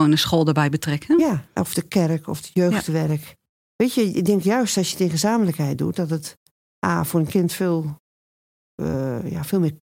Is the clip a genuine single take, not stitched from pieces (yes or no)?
yes